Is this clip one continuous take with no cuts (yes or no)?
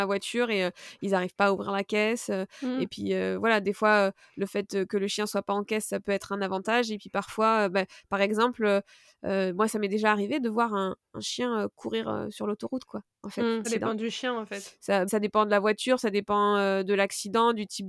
no